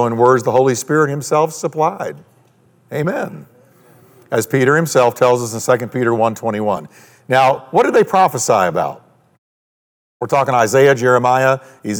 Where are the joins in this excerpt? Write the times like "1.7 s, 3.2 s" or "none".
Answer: none